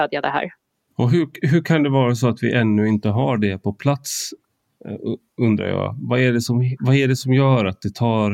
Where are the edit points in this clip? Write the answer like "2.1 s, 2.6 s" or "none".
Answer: none